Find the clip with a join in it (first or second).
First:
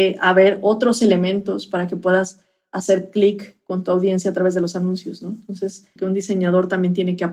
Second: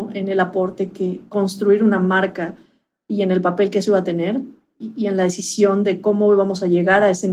first